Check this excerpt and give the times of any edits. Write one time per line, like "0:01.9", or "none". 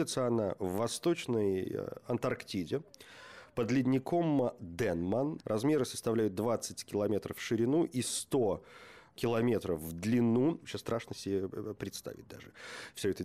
0:05.4
0:10.6